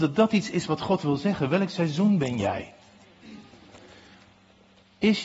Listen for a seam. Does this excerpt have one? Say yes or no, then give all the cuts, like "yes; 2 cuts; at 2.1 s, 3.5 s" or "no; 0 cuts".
no; 0 cuts